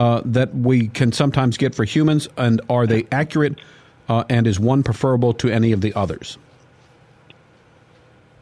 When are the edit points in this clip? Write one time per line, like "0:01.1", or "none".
none